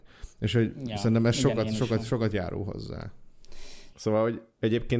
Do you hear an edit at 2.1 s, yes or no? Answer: no